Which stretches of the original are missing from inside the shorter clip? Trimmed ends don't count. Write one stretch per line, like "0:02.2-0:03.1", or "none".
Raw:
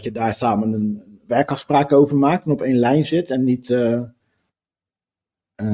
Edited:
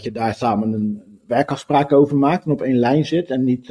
none

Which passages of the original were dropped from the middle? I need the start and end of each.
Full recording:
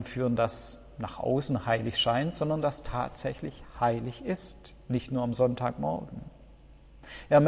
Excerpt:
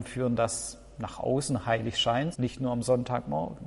0:02.3-0:04.8

